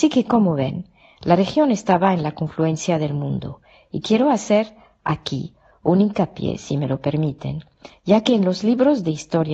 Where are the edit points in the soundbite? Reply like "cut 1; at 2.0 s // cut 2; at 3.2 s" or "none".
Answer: none